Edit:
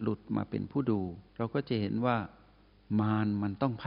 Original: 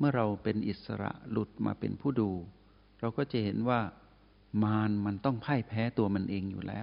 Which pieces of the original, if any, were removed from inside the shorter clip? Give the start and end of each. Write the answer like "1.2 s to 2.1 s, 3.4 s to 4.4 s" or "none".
2.6 s to 2.9 s